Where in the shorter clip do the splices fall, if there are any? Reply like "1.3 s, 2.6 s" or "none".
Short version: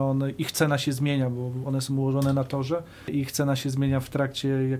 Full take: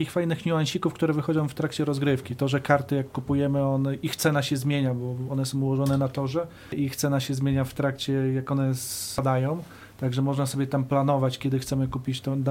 none